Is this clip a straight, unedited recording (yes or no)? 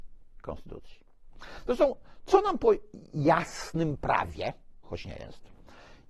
no